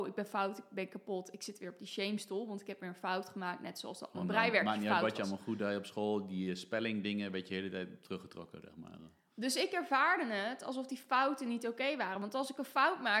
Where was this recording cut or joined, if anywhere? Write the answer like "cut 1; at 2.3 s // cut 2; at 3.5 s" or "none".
none

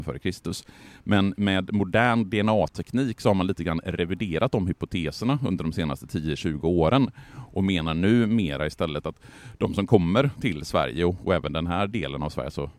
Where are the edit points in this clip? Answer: none

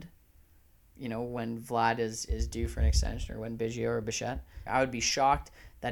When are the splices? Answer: cut 1; at 0.9 s // cut 2; at 4.7 s

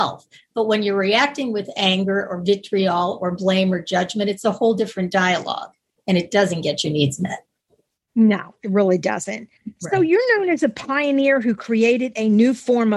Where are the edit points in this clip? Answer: none

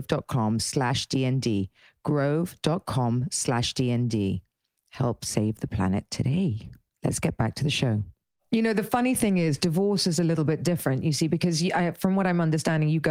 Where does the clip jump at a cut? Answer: none

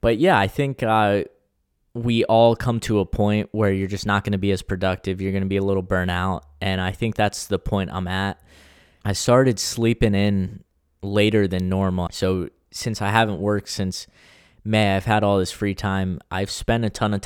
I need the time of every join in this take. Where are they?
cut 1; at 9.0 s // cut 2; at 12.1 s

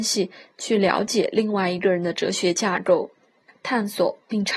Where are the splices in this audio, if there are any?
cut 1; at 3.5 s

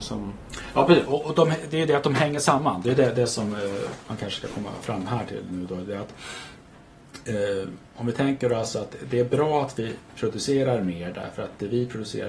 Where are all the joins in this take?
none

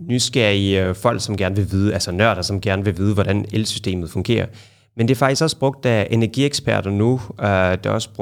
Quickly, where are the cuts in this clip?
none

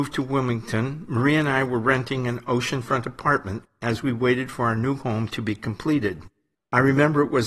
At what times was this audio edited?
cut 1; at 6.5 s

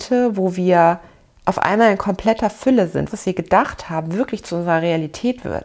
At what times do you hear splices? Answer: cut 1; at 3.1 s

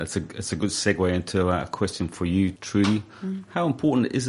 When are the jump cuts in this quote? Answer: cut 1; at 2.6 s

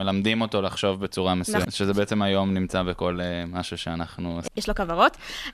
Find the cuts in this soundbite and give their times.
cut 1; at 1.6 s // cut 2; at 4.5 s

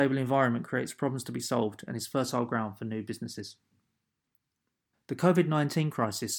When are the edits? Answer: cut 1; at 4.9 s

